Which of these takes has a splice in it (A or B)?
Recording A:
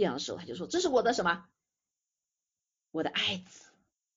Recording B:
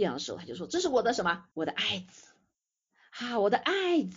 B